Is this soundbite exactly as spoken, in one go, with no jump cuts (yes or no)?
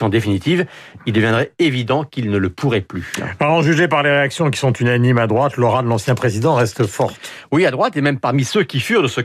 yes